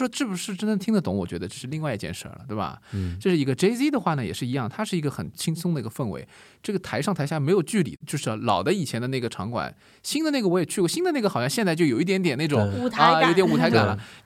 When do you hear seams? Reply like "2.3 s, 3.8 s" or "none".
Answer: none